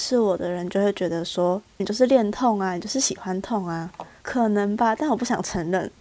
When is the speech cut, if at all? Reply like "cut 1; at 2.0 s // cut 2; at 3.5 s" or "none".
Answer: cut 1; at 1.8 s // cut 2; at 4.2 s